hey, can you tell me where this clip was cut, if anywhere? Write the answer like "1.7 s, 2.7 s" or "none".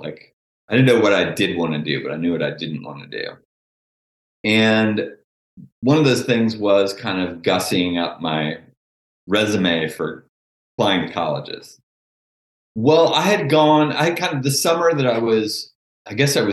12.7 s